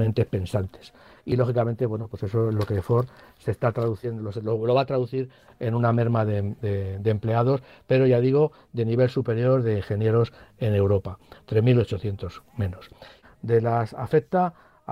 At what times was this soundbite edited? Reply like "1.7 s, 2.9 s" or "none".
13.2 s